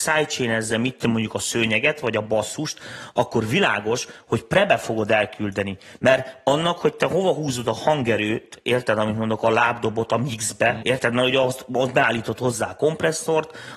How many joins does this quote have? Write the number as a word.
one